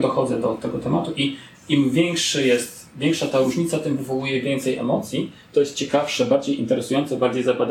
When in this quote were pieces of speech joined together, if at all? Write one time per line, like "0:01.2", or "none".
none